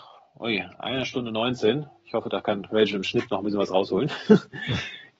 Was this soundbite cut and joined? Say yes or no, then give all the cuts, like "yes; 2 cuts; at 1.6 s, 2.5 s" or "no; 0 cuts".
no; 0 cuts